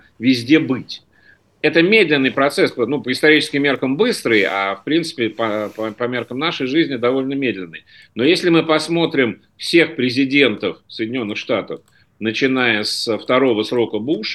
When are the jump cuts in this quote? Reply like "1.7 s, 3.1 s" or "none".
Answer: none